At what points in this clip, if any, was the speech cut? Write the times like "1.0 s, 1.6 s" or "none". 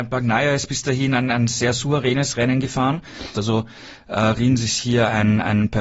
3.3 s